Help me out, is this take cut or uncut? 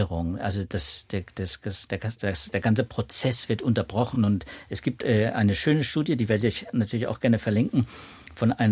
uncut